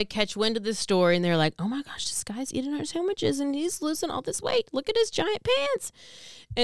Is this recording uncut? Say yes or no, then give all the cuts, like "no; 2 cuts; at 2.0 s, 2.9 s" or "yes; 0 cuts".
yes; 0 cuts